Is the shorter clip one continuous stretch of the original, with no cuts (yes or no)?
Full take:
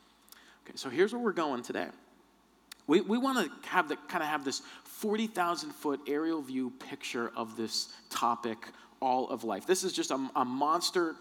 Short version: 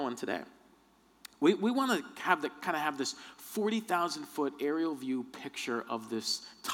yes